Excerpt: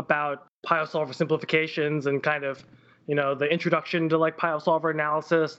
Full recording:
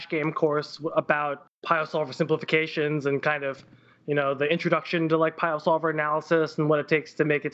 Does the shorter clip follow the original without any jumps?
yes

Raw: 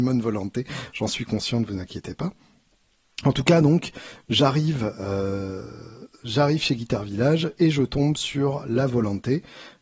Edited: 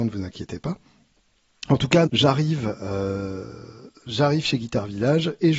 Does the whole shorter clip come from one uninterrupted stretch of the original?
no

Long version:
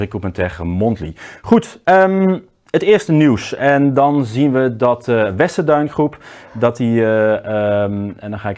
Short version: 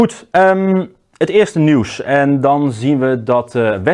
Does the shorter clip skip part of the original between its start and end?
no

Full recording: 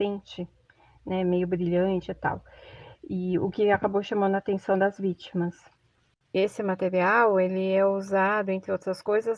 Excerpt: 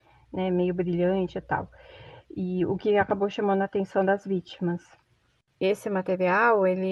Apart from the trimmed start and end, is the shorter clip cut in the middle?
no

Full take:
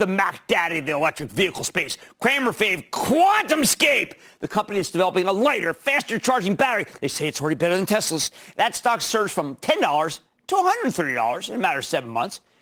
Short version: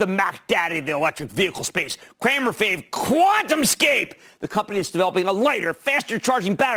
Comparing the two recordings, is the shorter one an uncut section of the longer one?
yes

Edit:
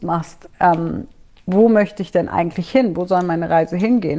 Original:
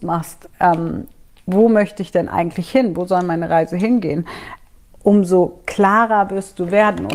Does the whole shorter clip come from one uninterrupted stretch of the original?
yes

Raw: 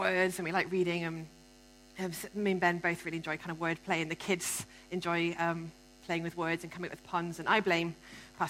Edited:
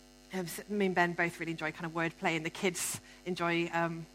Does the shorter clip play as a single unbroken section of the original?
yes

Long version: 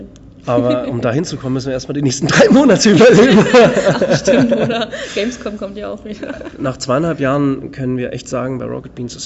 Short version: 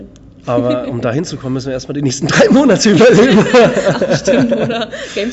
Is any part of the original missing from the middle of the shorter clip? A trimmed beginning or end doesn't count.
no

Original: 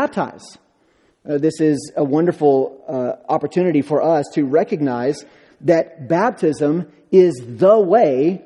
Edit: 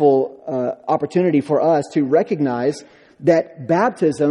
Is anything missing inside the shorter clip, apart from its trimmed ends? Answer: no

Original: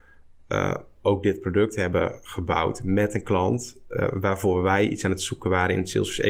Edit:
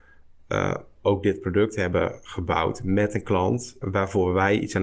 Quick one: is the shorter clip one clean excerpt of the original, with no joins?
no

